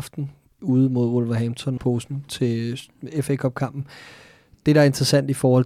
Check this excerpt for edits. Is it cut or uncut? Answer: cut